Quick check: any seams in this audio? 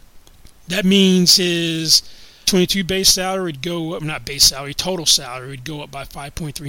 yes; 1 cut; at 2.4 s

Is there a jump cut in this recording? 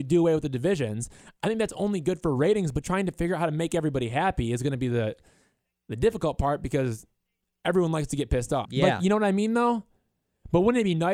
yes; 2 cuts; at 2.8 s, 8.6 s

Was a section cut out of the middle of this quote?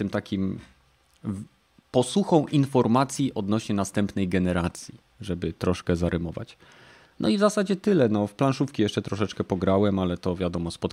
no; 0 cuts

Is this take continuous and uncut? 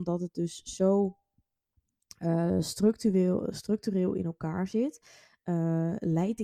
yes; 0 cuts

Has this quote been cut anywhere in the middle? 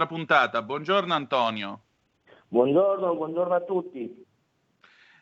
no; 0 cuts

